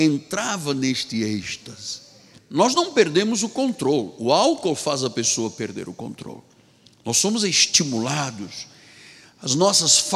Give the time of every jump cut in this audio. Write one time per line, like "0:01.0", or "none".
0:02.4